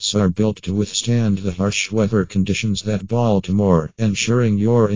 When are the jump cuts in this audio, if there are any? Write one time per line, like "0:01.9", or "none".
0:03.9